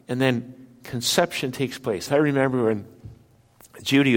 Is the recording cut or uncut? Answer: cut